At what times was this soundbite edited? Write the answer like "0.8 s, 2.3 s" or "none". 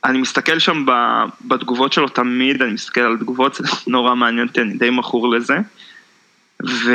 none